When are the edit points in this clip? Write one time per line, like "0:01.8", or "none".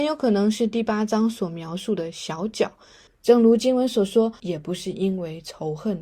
0:03.1
0:04.4